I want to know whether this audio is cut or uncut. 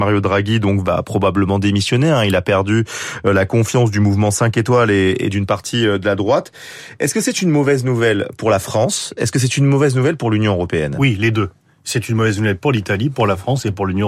uncut